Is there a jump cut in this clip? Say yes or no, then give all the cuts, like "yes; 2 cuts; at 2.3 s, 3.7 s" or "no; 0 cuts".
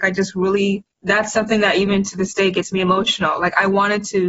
yes; 1 cut; at 0.9 s